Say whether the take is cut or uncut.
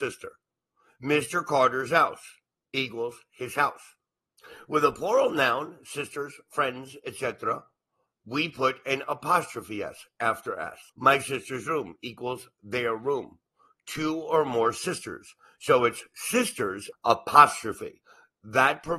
cut